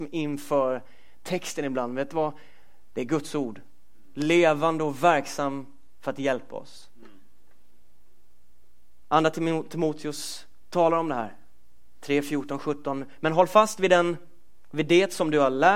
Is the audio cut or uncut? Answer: uncut